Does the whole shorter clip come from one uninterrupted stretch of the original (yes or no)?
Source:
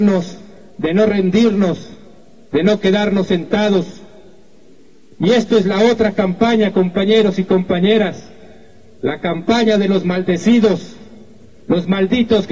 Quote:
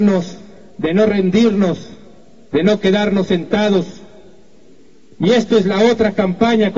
yes